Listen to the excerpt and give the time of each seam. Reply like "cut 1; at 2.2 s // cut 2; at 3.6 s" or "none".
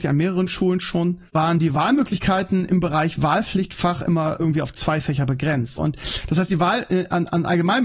cut 1; at 1.3 s // cut 2; at 5.8 s